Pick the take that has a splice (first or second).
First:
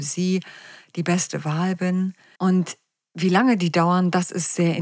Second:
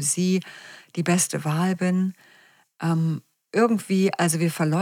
first